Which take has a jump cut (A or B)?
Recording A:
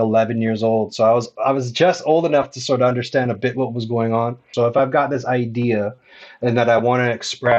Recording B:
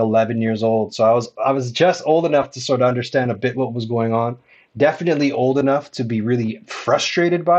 A